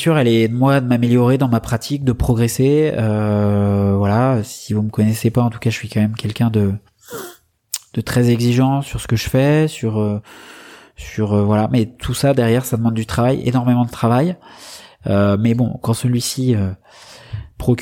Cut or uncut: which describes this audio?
uncut